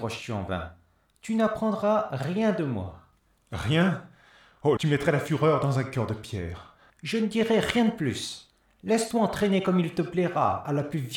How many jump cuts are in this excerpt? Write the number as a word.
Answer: two